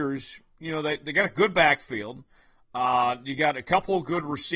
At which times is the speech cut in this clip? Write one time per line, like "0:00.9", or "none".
none